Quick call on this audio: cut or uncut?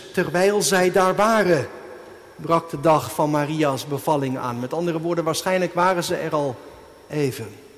uncut